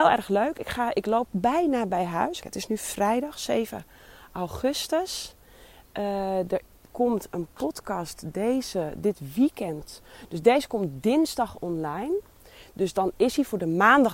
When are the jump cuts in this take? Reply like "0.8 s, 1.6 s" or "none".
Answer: 2.4 s